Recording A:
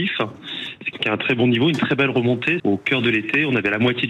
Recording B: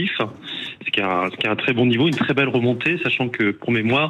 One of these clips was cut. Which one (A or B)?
A